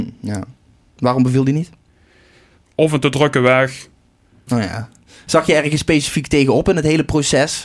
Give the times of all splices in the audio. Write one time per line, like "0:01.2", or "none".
0:04.5